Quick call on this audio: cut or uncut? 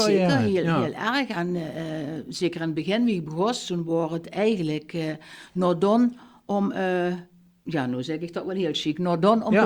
uncut